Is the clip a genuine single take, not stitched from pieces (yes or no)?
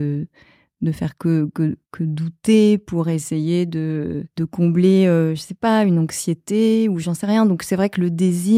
yes